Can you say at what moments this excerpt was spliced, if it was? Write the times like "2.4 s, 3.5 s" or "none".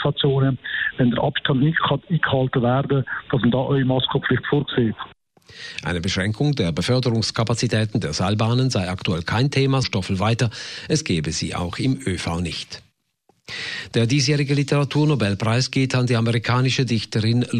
9.8 s

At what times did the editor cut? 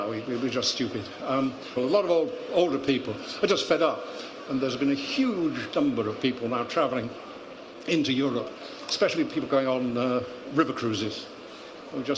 1.8 s, 4.5 s

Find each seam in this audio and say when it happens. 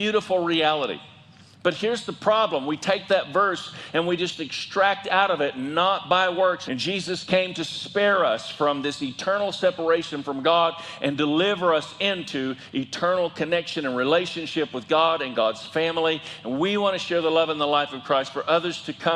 6.7 s

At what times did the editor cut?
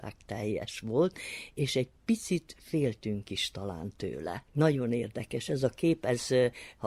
4.5 s

